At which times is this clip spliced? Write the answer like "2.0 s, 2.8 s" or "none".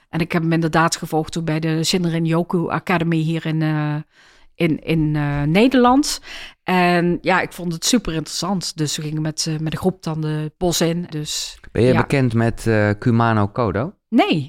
11.1 s